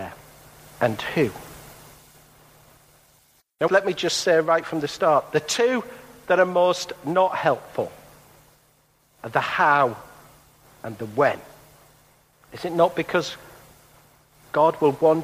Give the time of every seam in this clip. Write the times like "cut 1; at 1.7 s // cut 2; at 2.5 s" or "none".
cut 1; at 3.7 s // cut 2; at 12.3 s